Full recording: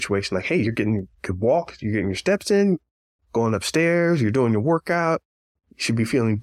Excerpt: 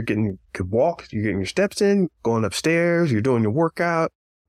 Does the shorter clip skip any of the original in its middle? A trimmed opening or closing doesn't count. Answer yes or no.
yes